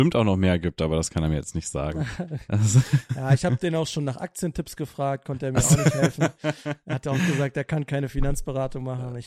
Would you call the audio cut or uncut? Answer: uncut